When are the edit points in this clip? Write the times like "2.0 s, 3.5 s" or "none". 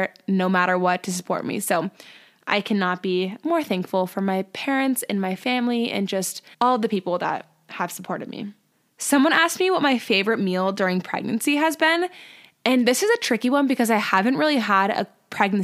6.5 s